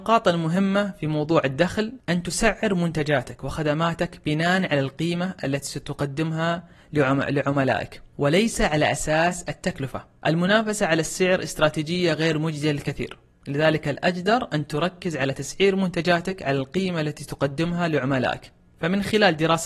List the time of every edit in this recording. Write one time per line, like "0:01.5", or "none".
none